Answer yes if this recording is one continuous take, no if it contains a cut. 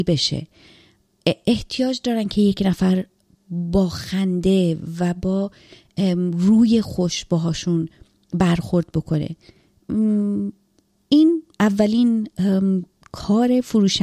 no